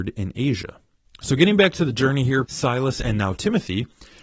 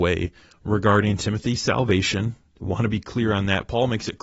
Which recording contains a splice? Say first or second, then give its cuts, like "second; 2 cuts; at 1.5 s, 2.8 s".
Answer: first; 2 cuts; at 1.0 s, 2.5 s